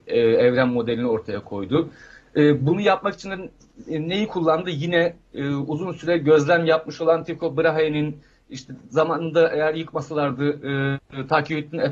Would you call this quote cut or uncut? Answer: uncut